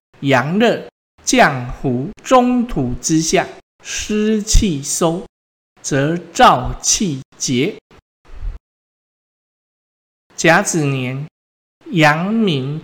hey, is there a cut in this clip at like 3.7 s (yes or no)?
yes